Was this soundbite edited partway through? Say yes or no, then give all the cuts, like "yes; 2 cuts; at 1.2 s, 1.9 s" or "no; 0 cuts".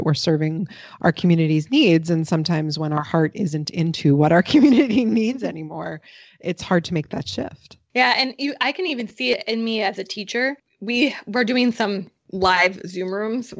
no; 0 cuts